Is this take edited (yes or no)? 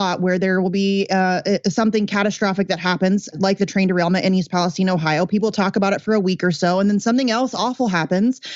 yes